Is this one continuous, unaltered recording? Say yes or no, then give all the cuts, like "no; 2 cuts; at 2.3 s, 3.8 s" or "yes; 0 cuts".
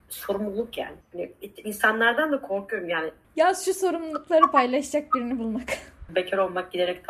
no; 3 cuts; at 1.0 s, 3.2 s, 6.1 s